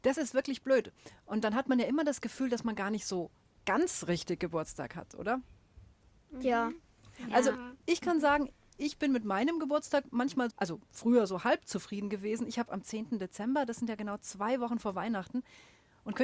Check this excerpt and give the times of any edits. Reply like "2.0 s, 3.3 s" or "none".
10.5 s